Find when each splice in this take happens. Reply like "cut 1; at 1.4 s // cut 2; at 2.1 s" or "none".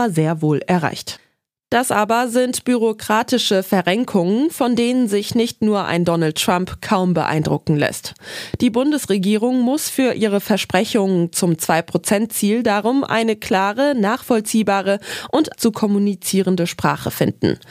cut 1; at 15.5 s